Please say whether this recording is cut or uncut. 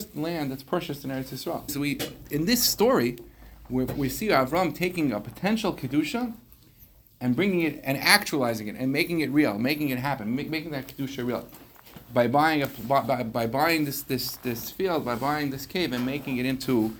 cut